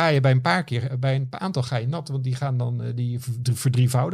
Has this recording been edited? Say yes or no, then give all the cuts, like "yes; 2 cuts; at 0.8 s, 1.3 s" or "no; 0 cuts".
no; 0 cuts